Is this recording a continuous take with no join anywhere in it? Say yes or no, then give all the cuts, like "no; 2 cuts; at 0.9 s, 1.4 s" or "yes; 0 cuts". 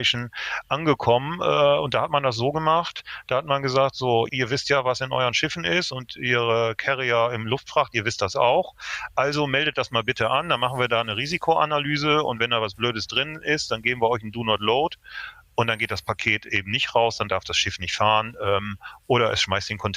no; 1 cut; at 4.3 s